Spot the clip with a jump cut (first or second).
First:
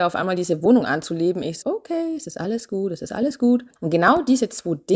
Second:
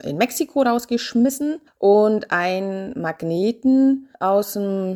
first